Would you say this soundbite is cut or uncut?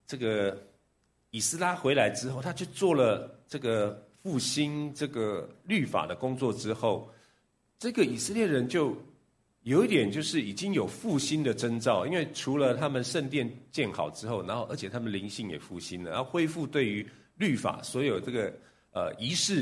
uncut